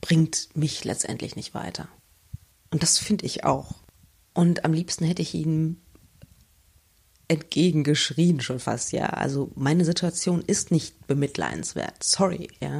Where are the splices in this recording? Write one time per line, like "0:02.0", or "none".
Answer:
0:02.5